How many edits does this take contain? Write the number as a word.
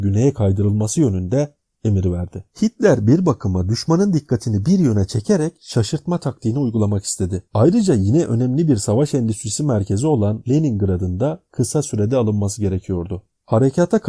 two